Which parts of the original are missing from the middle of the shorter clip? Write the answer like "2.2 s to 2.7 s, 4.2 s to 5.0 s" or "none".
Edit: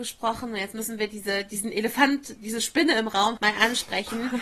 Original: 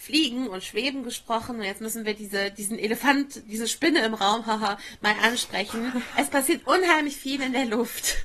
4.4 s to 5.0 s